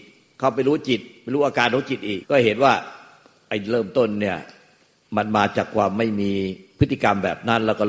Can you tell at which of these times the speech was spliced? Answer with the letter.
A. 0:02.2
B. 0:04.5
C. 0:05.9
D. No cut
A